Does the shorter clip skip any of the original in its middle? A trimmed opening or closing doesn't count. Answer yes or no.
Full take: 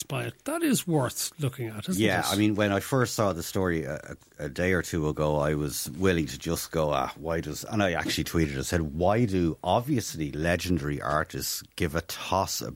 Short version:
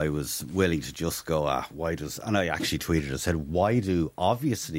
no